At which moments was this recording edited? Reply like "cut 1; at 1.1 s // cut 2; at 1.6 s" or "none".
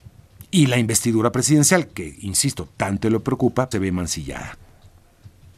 cut 1; at 3.7 s